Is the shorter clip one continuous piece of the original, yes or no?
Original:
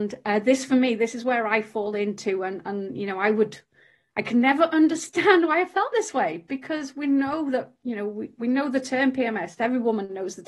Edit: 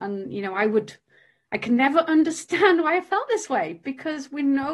yes